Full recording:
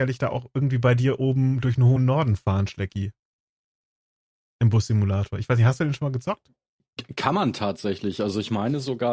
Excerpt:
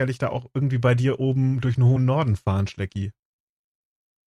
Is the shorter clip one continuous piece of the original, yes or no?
yes